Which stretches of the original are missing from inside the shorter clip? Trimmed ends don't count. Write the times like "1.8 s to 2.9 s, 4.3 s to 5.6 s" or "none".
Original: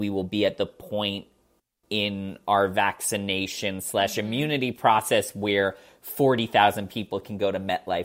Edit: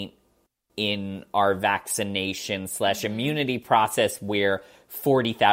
none